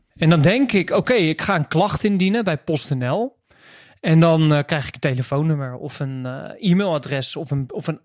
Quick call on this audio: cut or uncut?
uncut